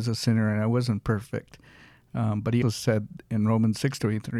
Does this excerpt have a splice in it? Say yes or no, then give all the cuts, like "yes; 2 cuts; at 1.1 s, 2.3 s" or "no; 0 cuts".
yes; 1 cut; at 2.6 s